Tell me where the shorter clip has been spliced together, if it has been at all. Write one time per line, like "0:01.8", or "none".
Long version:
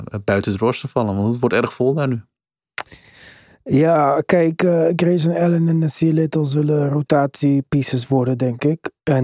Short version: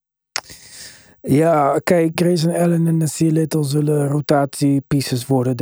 0:02.1